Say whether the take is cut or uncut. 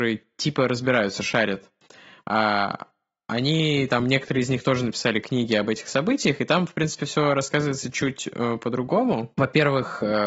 uncut